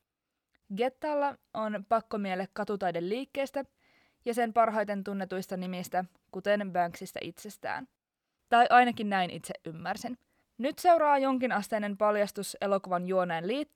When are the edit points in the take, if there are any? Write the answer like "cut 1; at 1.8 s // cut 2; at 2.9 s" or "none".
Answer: cut 1; at 8.4 s // cut 2; at 10.4 s